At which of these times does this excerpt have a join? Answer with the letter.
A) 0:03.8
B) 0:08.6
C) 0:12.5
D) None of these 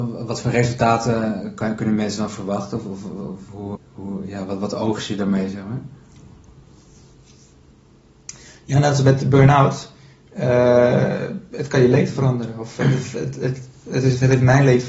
A